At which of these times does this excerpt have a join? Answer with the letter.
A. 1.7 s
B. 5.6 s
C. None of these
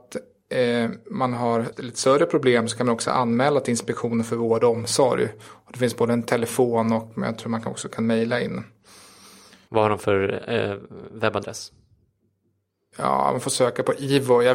A